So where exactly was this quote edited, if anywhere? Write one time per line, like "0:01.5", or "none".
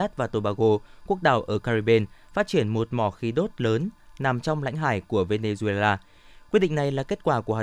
none

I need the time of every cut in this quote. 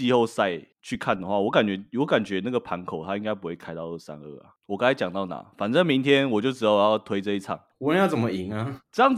0:04.6
0:07.7

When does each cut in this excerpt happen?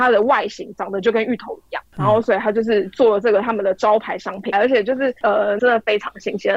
0:04.5
0:05.6

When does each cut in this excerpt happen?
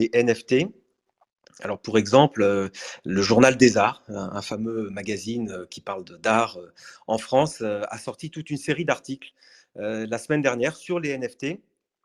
none

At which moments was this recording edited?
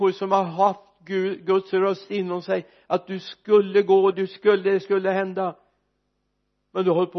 0:04.1

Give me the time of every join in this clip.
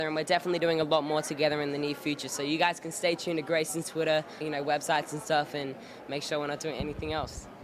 0:04.4

